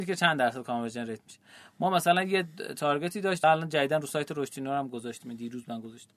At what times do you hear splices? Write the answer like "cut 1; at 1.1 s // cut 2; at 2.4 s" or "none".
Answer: cut 1; at 3.4 s

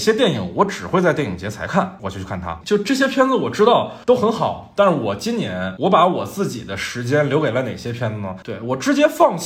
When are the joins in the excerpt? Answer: cut 1; at 2.6 s // cut 2; at 8.4 s

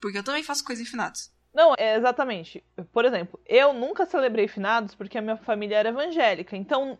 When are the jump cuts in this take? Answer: cut 1; at 1.7 s

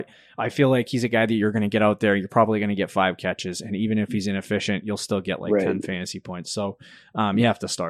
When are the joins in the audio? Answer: none

